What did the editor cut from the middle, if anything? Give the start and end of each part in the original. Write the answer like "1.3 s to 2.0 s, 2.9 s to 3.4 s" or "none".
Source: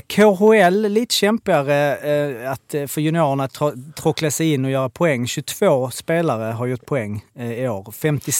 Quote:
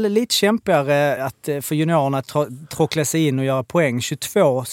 2.0 s to 2.4 s